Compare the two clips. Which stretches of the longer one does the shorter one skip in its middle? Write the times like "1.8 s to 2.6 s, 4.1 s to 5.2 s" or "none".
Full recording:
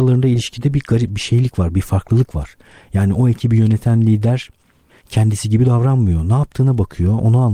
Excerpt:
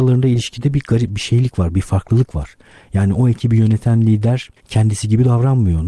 4.6 s to 5.0 s